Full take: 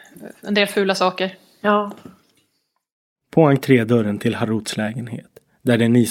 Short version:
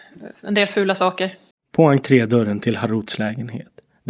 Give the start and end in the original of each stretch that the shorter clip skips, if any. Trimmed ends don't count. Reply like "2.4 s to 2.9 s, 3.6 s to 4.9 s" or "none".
1.5 s to 3.1 s